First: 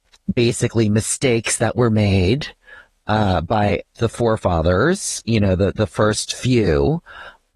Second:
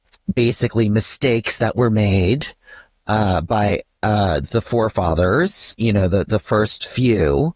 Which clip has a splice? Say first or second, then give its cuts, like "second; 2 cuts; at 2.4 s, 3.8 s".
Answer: first; 1 cut; at 3.9 s